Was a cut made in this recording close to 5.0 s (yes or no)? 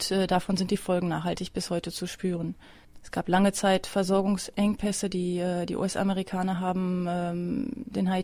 no